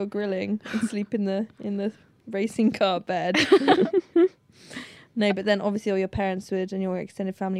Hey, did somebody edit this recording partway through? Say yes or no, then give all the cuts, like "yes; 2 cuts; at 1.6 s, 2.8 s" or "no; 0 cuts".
no; 0 cuts